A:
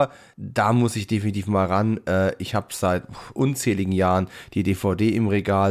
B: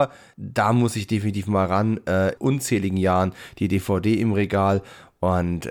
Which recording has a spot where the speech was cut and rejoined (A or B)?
B